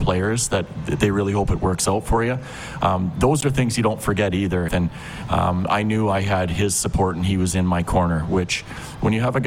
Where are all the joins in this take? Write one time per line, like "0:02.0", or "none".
0:04.7